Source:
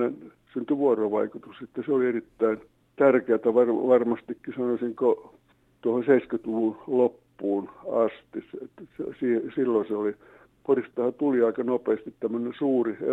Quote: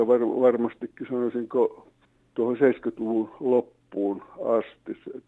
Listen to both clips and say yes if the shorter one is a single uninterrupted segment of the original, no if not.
yes